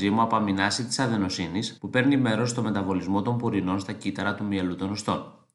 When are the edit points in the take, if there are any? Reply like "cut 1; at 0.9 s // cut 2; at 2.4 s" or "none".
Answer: cut 1; at 1.8 s